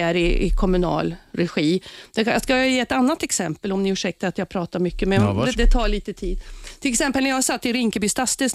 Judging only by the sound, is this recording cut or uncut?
cut